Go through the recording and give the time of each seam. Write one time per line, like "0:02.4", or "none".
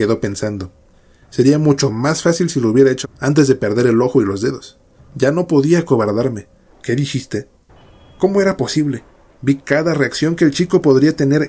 0:03.0
0:05.0
0:06.7